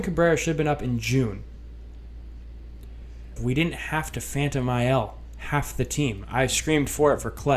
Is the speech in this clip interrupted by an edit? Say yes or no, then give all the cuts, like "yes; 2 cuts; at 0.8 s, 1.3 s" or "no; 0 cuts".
yes; 1 cut; at 3.4 s